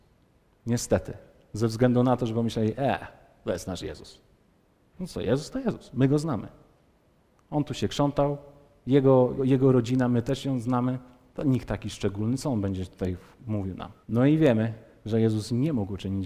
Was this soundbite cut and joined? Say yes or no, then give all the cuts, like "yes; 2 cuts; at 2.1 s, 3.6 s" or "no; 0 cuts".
yes; 2 cuts; at 9.4 s, 14.0 s